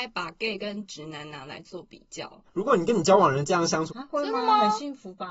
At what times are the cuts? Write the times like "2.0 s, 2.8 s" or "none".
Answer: 2.4 s, 3.9 s